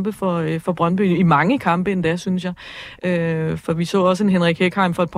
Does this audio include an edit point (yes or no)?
yes